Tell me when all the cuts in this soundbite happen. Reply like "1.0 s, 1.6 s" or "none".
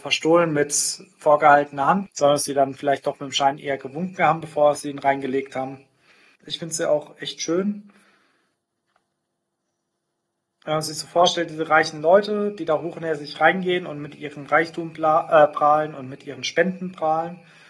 2.1 s, 6.4 s